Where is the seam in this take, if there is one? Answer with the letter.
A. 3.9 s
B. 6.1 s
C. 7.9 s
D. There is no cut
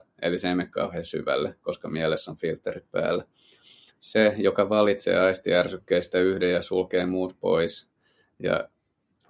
A